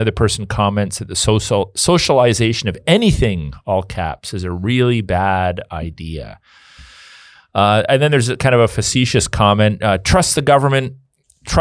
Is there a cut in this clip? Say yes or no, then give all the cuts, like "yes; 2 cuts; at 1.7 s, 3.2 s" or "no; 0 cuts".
no; 0 cuts